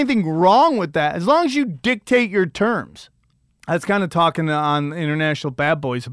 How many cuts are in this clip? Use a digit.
1